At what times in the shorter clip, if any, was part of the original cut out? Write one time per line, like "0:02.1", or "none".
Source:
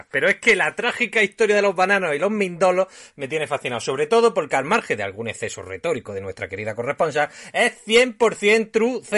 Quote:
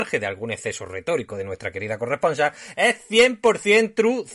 none